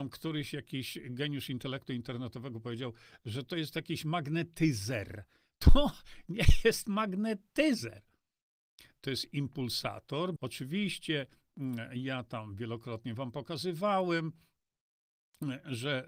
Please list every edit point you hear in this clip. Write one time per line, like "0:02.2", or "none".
0:06.3
0:10.4